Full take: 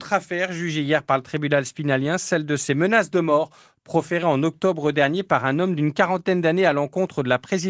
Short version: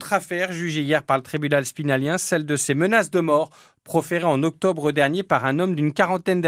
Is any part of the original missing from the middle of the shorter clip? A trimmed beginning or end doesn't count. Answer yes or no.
no